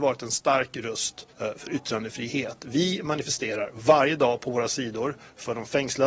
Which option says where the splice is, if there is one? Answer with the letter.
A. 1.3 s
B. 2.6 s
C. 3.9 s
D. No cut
A